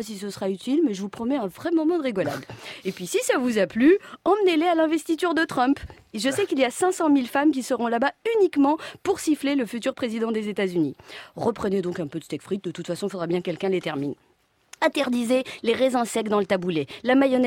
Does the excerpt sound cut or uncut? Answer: uncut